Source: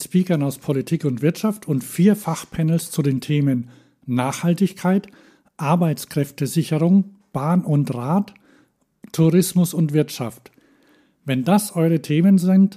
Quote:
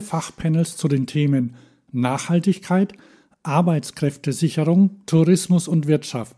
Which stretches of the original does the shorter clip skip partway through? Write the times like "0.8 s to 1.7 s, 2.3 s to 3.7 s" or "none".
7.2 s to 9.1 s